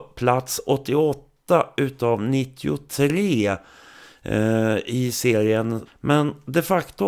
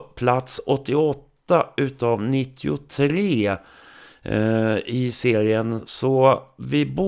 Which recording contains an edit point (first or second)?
first